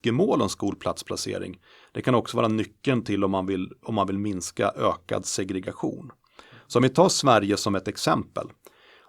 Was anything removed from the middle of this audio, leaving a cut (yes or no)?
no